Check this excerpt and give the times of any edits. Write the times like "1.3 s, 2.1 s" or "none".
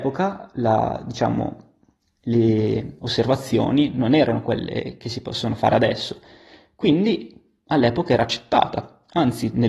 none